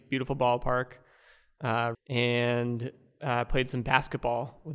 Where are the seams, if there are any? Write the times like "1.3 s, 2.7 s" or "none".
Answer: 1.9 s